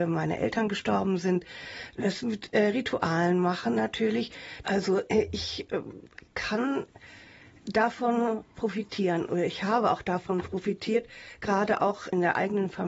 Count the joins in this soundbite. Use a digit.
1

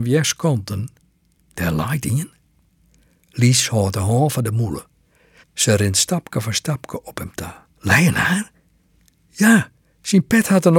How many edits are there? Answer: 2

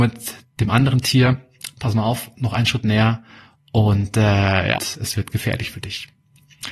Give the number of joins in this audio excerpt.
1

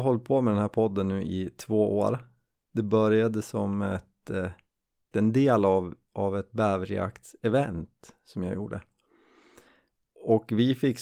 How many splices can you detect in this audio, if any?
1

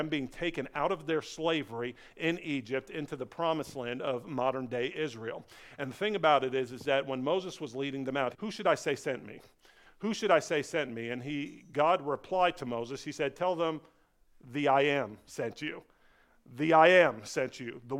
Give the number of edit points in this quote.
1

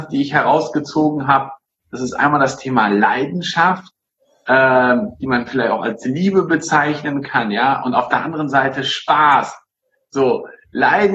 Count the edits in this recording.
0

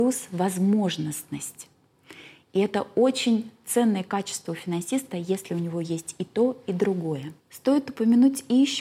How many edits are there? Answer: 1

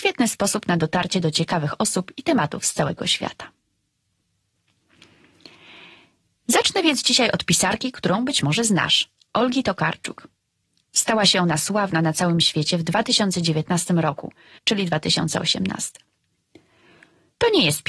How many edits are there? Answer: 1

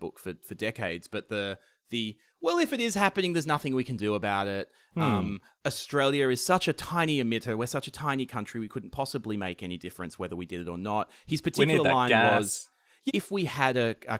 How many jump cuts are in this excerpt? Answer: 1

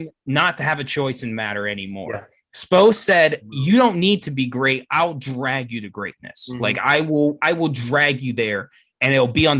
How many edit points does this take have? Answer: 0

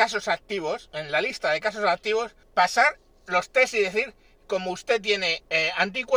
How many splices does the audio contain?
1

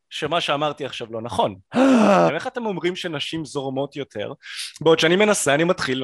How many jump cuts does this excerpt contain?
1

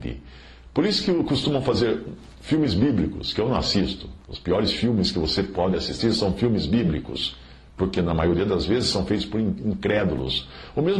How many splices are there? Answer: 0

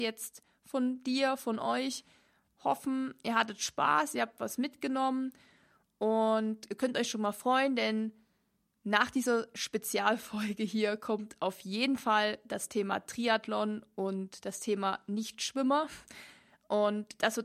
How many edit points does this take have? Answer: 0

